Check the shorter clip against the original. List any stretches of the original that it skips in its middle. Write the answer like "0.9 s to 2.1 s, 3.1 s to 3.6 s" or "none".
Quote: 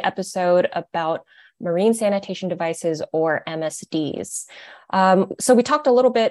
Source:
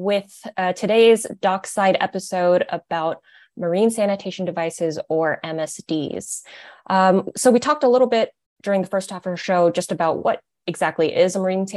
none